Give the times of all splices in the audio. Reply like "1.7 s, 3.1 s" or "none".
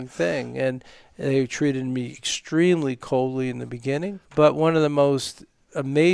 4.2 s